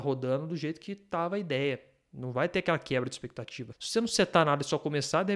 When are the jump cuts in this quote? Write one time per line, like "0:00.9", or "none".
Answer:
none